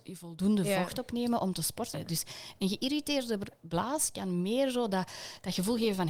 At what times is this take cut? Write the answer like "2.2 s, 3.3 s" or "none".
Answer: 1.9 s